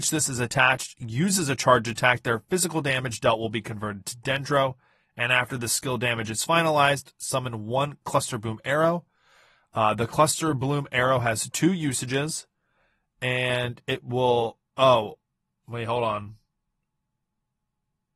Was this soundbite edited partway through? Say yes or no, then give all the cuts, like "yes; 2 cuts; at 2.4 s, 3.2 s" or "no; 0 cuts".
no; 0 cuts